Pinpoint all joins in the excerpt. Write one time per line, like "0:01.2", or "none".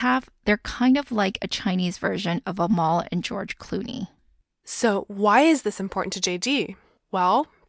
none